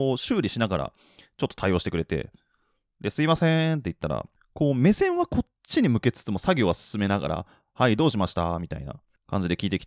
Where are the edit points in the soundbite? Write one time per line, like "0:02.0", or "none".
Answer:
none